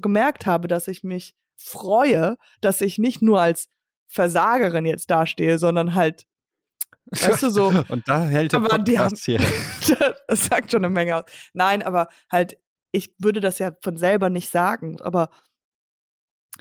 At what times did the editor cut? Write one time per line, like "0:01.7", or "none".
0:13.1
0:15.0